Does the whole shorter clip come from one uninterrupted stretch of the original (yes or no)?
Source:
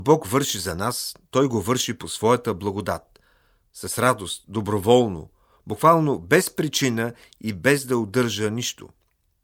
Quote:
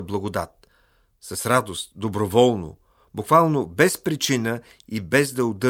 yes